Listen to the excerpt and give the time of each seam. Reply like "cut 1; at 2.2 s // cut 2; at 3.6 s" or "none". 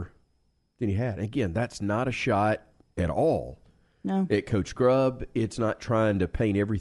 none